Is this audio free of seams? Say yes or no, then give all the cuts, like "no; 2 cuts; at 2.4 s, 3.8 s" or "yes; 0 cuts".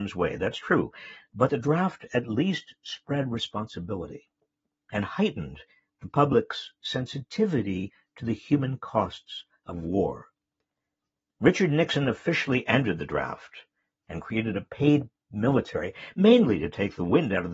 yes; 0 cuts